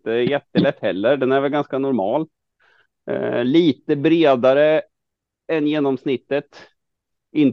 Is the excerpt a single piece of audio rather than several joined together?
yes; 0 cuts

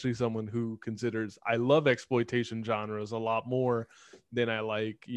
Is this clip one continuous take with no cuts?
yes; 0 cuts

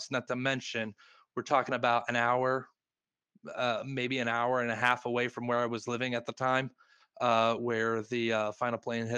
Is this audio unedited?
yes; 0 cuts

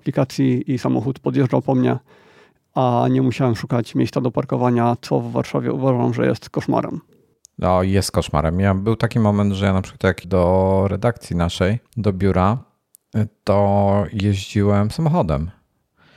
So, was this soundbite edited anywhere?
yes; 2 cuts; at 10.2 s, 11.9 s

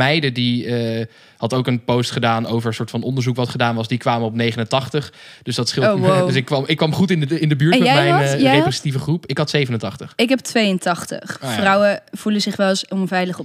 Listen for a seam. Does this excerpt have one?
no; 0 cuts

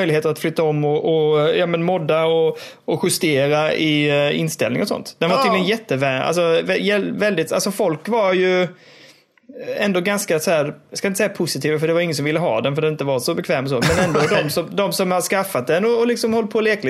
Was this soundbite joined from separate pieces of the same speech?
no; 0 cuts

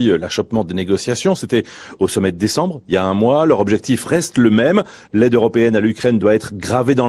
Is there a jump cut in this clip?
yes; 1 cut; at 5.1 s

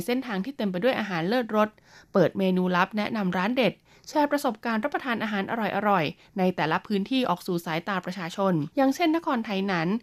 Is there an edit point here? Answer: yes; 1 cut; at 8.7 s

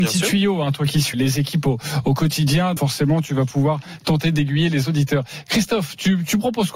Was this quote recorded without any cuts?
no; 2 cuts; at 1.1 s, 2.8 s

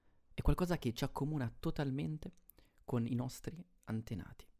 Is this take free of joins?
yes; 0 cuts

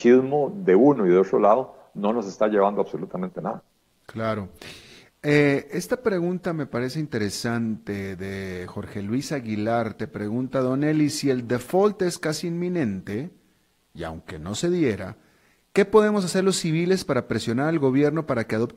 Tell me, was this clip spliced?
no; 0 cuts

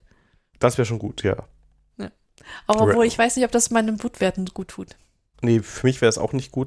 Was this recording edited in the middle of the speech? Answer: no; 0 cuts

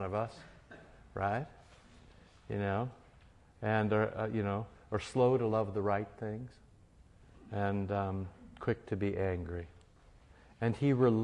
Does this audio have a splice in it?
no; 0 cuts

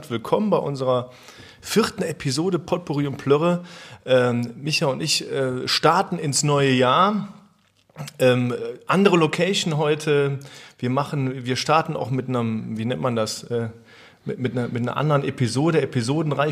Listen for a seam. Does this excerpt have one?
no; 0 cuts

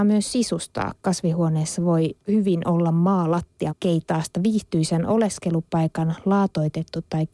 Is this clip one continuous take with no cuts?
no; 2 cuts; at 2.2 s, 3.7 s

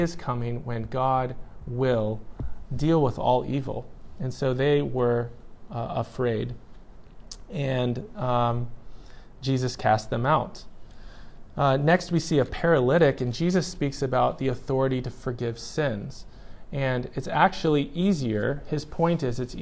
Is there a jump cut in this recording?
no; 0 cuts

